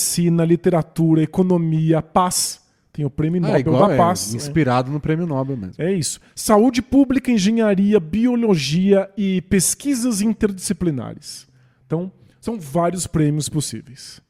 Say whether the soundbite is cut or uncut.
uncut